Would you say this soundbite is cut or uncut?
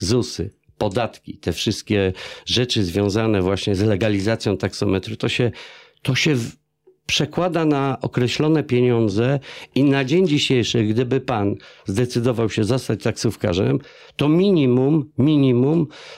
uncut